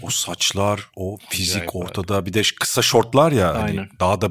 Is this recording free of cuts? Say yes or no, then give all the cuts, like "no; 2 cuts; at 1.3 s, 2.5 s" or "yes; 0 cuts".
yes; 0 cuts